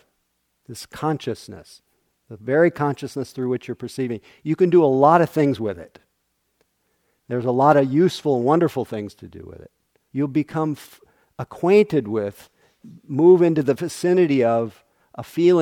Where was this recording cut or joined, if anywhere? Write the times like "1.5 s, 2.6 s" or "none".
10.1 s

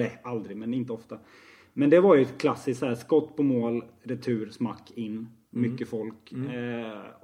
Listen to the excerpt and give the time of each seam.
none

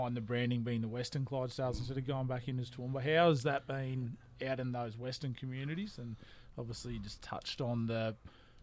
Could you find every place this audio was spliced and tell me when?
none

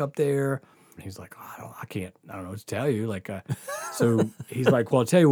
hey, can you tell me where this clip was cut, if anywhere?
1.0 s

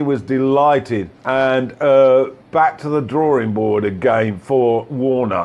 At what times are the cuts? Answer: 1.2 s, 2.4 s

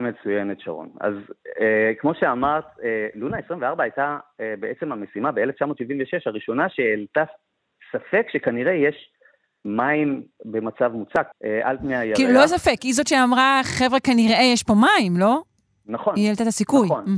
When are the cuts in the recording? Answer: 11.3 s

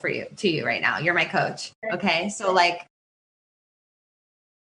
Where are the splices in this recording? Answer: 1.8 s

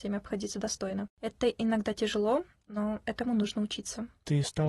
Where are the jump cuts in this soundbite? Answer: none

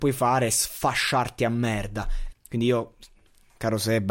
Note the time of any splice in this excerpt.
2.3 s

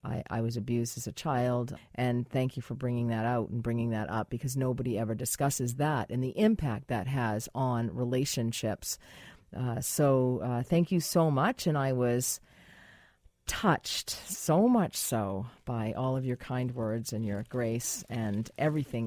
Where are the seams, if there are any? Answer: 1.8 s

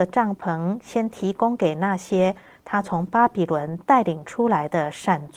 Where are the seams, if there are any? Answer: none

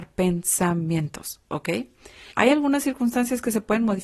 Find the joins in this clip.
2.3 s

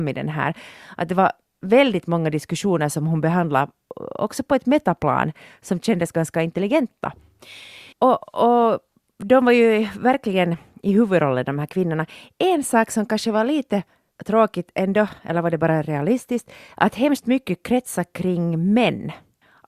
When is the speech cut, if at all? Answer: 7.9 s

